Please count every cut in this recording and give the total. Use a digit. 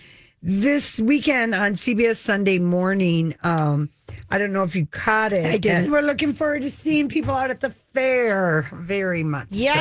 1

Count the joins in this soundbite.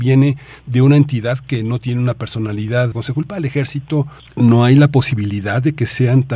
2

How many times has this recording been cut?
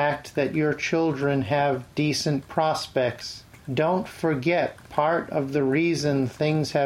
1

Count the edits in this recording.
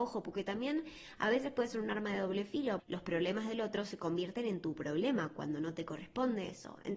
1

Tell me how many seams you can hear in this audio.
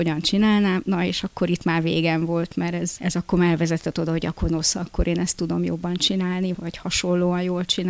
1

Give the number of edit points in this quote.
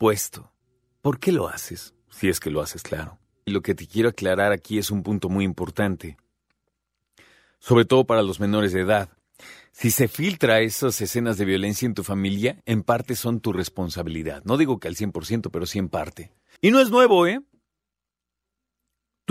1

